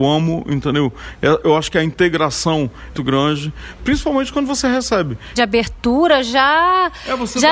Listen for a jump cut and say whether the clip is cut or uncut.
cut